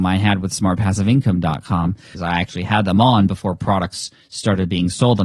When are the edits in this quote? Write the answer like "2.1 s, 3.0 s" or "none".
2.1 s